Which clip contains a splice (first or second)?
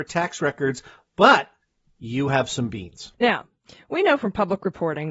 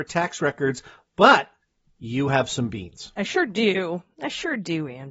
first